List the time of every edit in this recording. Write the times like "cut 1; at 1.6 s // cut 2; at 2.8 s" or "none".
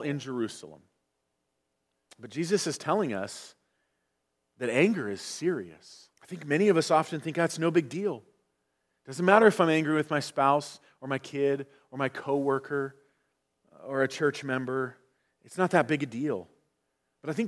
cut 1; at 2.1 s // cut 2; at 6.1 s